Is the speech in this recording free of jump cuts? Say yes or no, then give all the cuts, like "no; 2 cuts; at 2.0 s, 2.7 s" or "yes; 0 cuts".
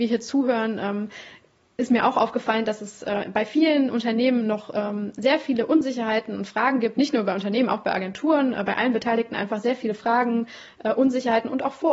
yes; 0 cuts